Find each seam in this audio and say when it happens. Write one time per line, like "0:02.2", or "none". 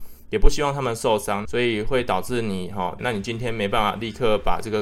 0:01.4
0:03.0